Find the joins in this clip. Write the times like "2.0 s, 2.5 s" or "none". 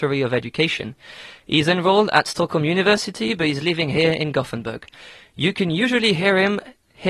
none